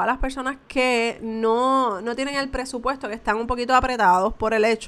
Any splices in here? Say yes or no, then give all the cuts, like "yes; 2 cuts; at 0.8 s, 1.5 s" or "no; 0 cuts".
no; 0 cuts